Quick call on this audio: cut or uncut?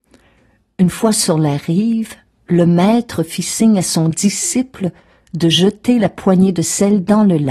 uncut